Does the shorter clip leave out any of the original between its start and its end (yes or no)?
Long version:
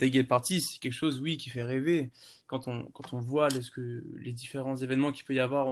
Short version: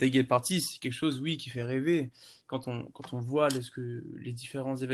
no